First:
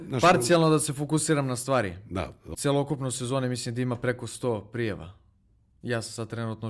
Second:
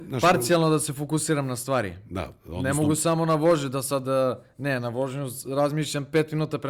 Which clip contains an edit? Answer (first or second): first